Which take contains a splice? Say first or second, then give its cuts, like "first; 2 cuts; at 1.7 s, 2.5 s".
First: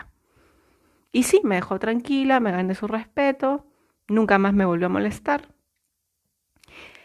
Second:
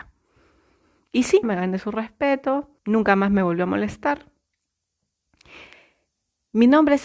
second; 2 cuts; at 1.4 s, 2.8 s